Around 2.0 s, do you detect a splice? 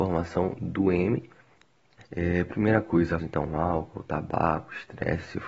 yes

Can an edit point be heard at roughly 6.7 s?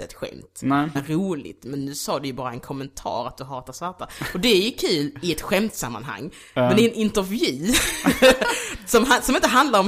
no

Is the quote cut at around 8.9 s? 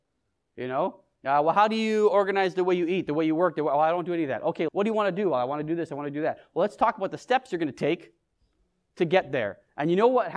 no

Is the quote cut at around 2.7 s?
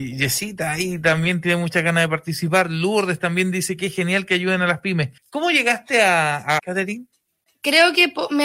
no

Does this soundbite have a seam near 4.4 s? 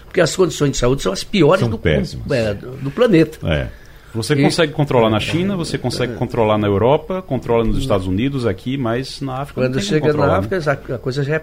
no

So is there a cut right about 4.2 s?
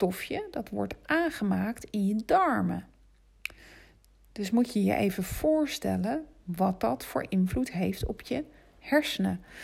no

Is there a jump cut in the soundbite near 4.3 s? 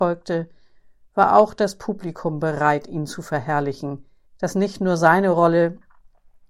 yes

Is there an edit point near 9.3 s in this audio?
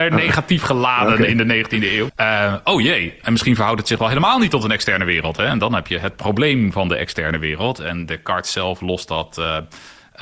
no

